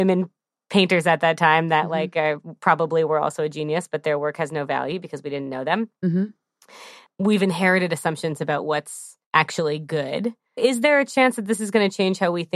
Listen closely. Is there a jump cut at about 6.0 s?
no; 2 cuts; at 9.2 s, 10.6 s

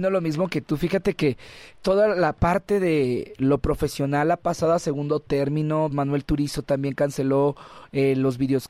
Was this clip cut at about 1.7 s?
yes; 2 cuts; at 1.7 s, 5.9 s

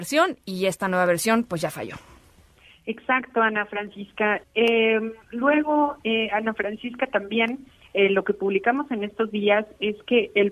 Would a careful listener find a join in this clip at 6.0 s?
no; 1 cut; at 4.4 s

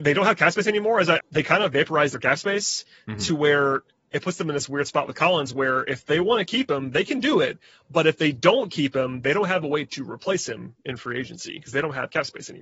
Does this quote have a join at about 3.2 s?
no; 1 cut; at 1.2 s

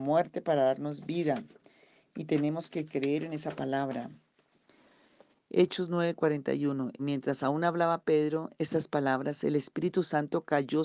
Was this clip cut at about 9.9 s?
no; 2 cuts; at 5.3 s, 7.0 s

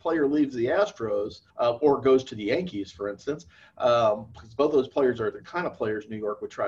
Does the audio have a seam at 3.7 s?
no; 1 cut; at 1.5 s

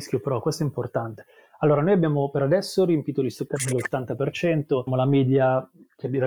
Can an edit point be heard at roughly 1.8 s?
no; 1 cut; at 4.9 s

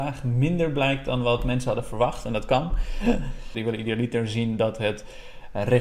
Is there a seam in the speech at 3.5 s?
yes; 1 cut; at 3.5 s

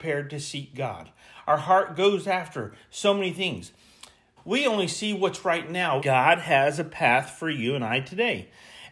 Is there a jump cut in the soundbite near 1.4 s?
no; 2 cuts; at 4.4 s, 6.0 s

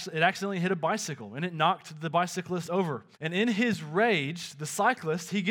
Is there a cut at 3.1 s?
yes; 1 cut; at 3.1 s

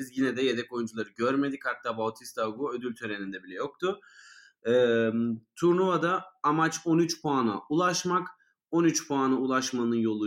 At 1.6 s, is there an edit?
no; 0 cuts

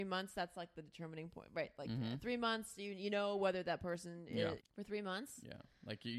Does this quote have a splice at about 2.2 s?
no; 1 cut; at 4.6 s

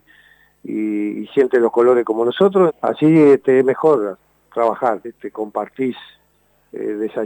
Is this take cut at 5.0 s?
yes; 2 cuts; at 2.7 s, 5.0 s

